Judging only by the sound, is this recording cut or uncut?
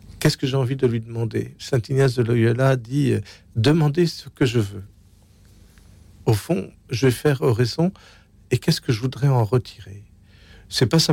uncut